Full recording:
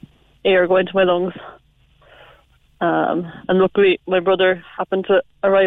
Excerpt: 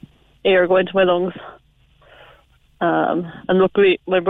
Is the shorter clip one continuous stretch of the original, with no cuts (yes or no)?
yes